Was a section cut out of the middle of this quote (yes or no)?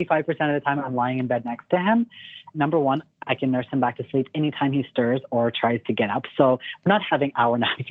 yes